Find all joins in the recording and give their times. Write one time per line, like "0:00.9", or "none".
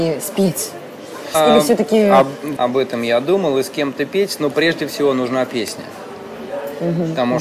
0:01.3
0:02.6